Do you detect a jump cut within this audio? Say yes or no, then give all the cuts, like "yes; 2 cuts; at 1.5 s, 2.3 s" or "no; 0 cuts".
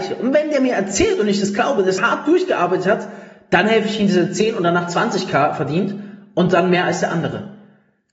yes; 1 cut; at 2.0 s